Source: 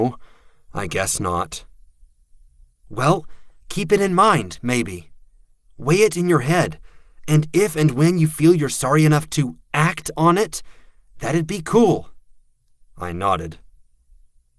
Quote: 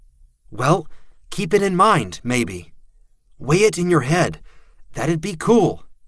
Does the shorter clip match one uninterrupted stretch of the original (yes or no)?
no